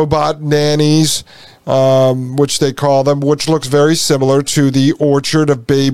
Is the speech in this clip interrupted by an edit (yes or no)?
no